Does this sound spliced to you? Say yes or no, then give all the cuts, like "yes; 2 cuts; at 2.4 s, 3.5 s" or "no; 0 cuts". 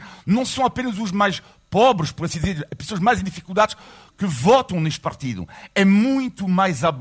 no; 0 cuts